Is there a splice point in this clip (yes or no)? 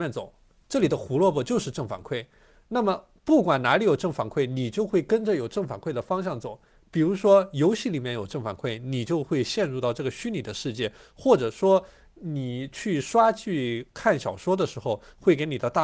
no